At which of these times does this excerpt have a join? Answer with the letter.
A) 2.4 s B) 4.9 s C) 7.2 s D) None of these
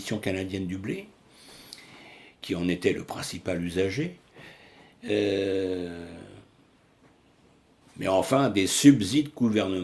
D